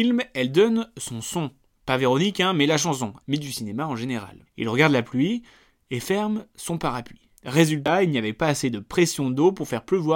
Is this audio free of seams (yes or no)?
no